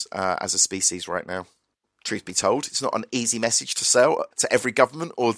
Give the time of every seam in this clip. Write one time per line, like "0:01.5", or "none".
0:01.8
0:04.3